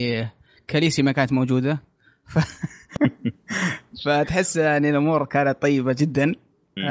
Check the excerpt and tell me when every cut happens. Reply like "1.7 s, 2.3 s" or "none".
3.0 s